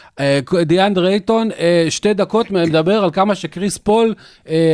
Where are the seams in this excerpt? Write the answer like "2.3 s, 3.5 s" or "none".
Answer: none